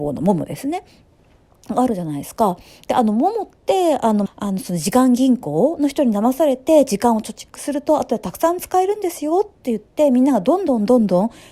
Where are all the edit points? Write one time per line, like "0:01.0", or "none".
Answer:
0:04.3